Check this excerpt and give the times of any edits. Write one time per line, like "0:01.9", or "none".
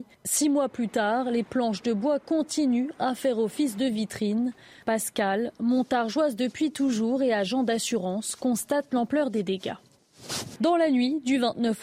0:10.6